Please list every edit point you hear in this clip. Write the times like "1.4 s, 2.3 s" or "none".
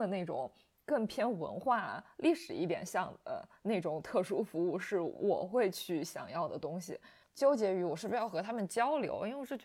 7.2 s